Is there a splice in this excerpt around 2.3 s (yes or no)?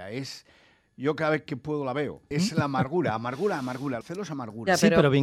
yes